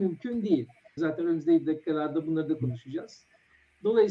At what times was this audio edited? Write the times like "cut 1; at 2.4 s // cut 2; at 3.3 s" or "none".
cut 1; at 1.0 s